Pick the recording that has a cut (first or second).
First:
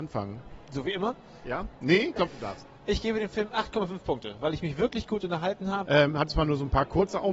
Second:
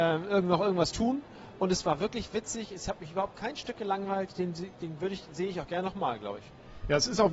first